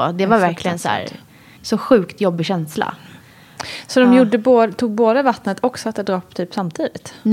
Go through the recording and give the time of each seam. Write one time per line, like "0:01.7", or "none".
0:01.6